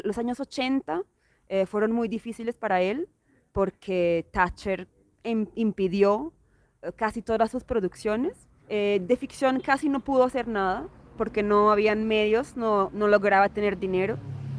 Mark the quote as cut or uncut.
cut